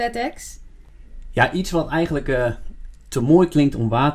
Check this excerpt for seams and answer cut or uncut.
uncut